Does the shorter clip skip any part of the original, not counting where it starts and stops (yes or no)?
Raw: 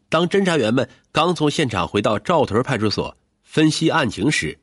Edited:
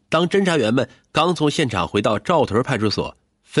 no